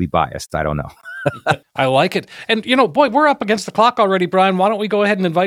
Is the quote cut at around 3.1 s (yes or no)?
no